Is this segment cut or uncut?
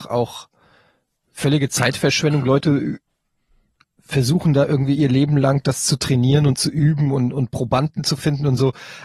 uncut